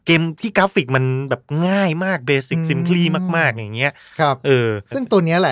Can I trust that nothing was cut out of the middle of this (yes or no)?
yes